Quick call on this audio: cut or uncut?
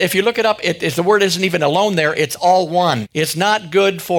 cut